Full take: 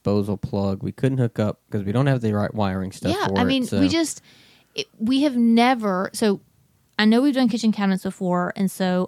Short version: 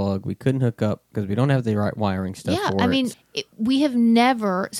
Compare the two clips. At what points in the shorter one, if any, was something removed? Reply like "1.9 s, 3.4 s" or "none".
3.1 s

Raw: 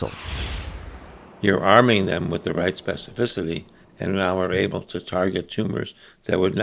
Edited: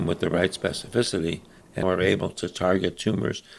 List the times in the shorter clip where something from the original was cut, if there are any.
1.8 s

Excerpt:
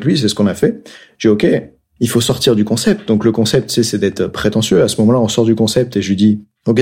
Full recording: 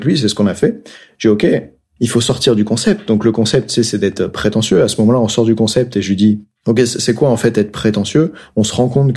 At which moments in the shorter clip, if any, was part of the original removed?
none

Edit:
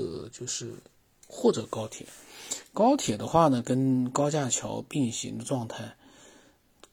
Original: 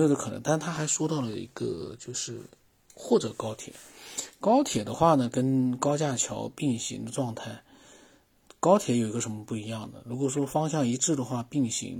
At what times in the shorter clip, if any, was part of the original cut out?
none

